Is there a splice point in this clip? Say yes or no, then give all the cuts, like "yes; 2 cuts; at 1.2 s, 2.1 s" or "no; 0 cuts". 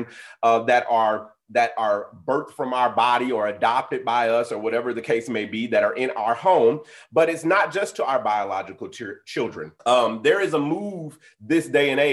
yes; 1 cut; at 9.8 s